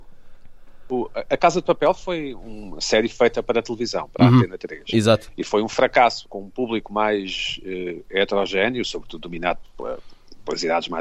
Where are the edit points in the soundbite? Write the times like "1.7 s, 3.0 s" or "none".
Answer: 6.2 s, 9.6 s